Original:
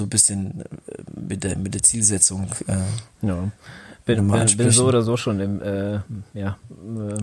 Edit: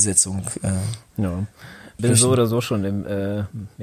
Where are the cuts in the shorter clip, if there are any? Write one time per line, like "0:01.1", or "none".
0:02.0